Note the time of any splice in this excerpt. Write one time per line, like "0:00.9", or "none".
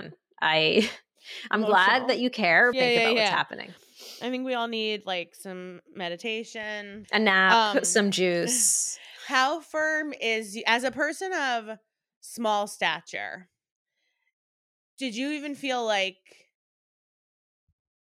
0:02.7
0:07.0